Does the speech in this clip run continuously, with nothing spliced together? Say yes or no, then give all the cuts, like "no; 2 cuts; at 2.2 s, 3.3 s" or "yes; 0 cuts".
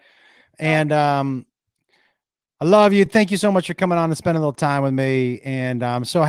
yes; 0 cuts